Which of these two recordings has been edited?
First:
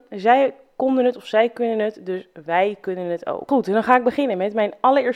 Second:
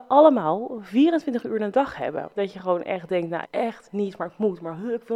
second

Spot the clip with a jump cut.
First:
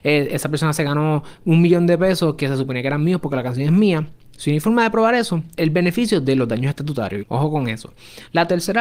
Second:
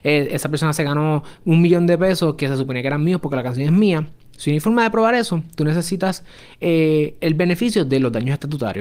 first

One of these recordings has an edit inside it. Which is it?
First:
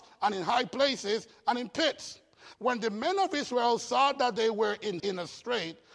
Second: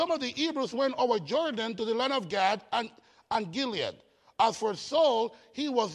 first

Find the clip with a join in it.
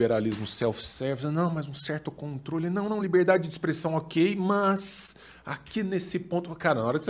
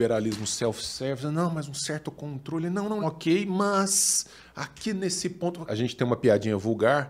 second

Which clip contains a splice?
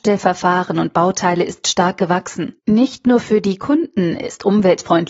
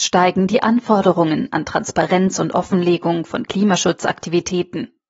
first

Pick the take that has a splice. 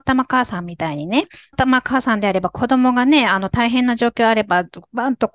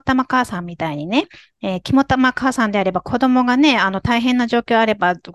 first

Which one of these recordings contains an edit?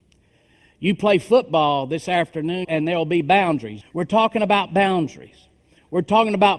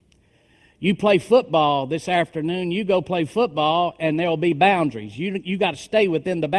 first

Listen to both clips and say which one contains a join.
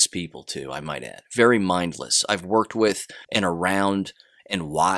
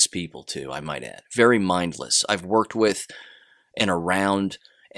first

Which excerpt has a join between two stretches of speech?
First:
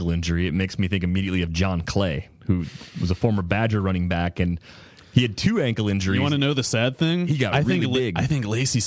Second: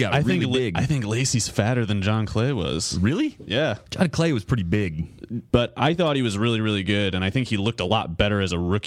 second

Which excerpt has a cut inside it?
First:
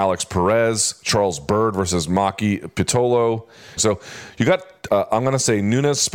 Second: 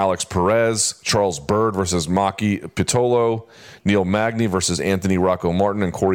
first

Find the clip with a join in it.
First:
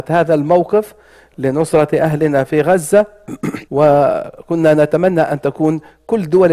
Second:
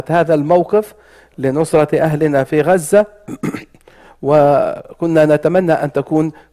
first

